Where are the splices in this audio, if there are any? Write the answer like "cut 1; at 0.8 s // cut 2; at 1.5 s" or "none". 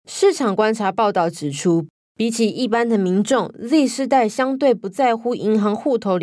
none